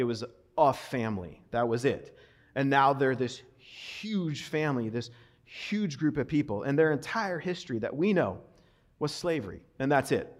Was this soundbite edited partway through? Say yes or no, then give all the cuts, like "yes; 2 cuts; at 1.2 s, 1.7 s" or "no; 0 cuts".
no; 0 cuts